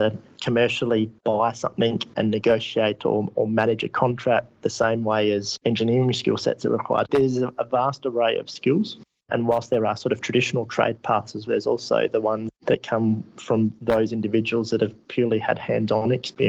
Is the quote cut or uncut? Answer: cut